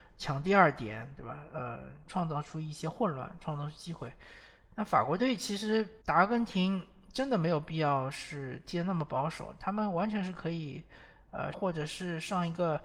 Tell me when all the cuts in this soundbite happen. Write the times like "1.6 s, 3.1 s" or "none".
6.0 s, 11.5 s